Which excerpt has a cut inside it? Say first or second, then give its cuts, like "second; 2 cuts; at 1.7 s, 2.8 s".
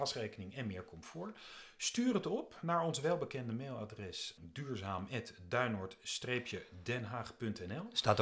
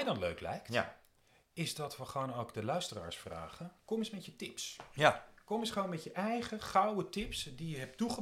first; 1 cut; at 4.4 s